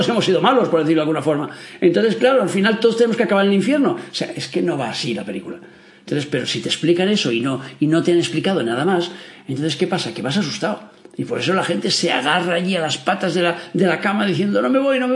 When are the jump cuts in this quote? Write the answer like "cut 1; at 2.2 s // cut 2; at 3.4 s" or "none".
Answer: none

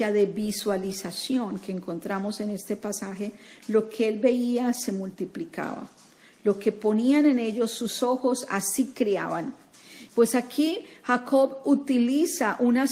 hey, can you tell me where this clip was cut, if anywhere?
cut 1; at 10.1 s

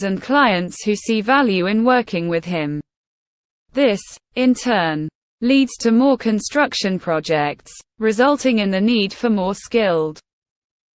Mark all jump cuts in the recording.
none

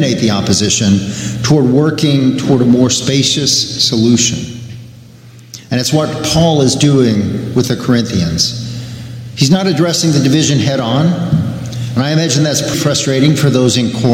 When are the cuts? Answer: cut 1; at 12.7 s

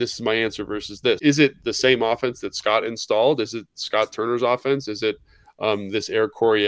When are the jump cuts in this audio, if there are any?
cut 1; at 1.2 s

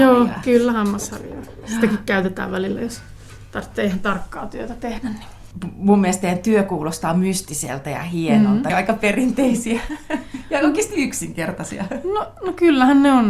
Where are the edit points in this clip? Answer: cut 1; at 8.7 s

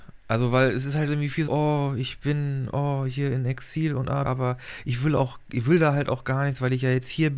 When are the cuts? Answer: cut 1; at 1.5 s // cut 2; at 4.2 s

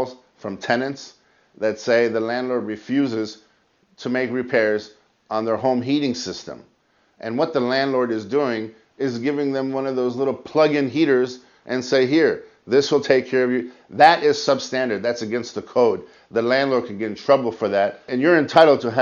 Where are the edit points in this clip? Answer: none

